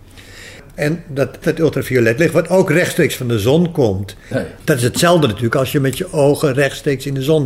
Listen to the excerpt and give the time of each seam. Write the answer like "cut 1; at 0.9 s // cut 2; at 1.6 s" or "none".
cut 1; at 1.4 s // cut 2; at 4.3 s